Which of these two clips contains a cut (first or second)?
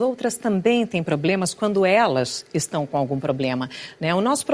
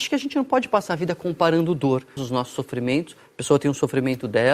second